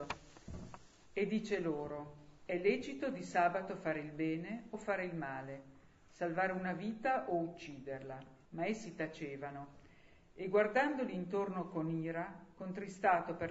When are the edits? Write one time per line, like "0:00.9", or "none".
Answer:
0:08.5